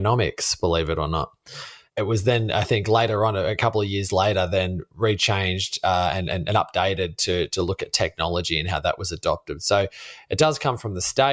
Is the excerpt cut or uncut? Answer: uncut